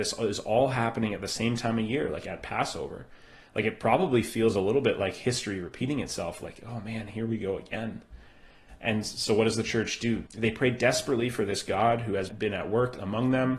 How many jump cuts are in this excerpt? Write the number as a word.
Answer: two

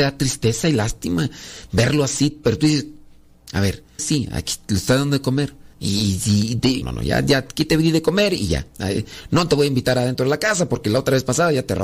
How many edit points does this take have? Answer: three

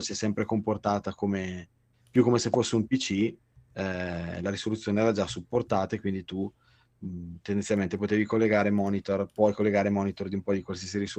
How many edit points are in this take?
zero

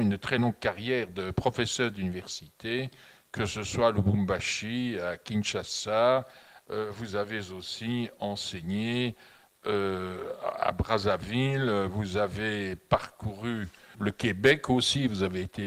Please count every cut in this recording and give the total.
one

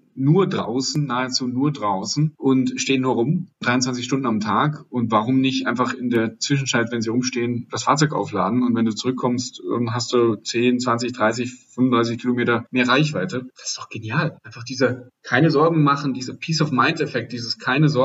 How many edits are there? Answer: zero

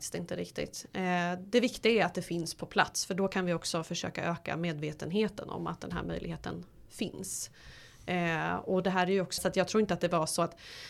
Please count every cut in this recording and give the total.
one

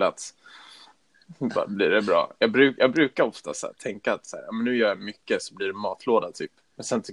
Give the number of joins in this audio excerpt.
zero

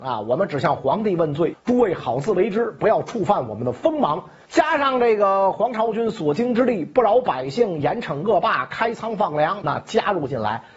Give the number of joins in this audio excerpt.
three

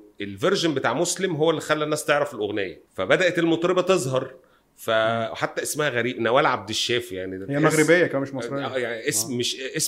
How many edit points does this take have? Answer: one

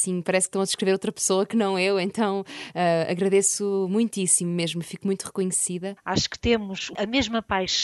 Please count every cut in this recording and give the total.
one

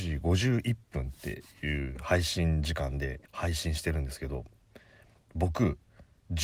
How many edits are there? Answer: one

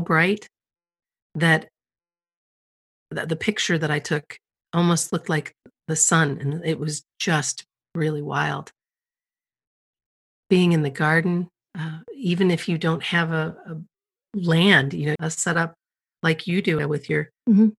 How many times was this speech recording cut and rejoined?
two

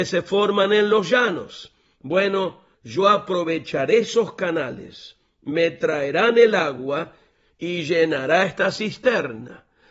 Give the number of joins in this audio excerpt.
one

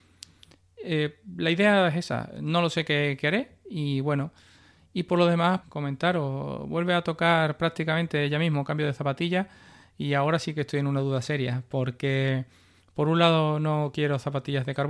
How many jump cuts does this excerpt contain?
one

